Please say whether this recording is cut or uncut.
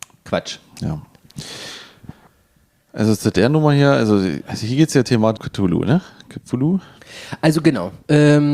cut